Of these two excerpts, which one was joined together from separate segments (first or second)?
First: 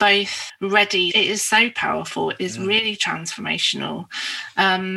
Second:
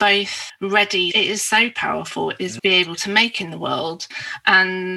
second